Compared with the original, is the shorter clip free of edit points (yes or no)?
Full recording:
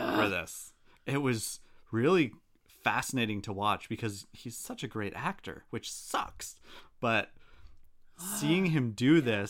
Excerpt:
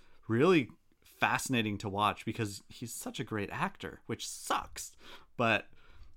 yes